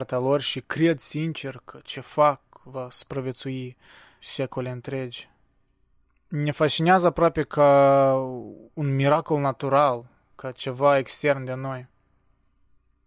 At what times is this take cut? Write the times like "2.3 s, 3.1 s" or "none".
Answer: 4.2 s